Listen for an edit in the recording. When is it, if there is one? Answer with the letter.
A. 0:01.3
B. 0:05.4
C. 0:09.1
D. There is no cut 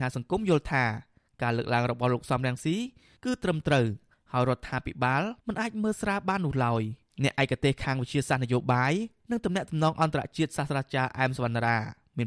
B